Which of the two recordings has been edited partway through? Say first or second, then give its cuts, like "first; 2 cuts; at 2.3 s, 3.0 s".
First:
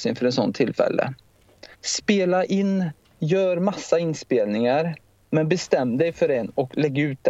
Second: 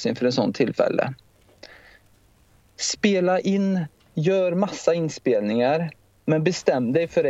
first; 1 cut; at 1.7 s